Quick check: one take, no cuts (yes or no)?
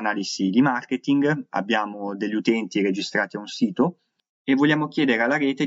yes